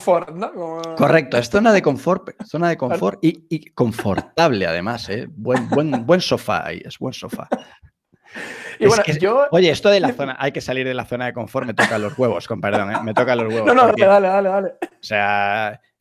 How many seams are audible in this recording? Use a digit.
0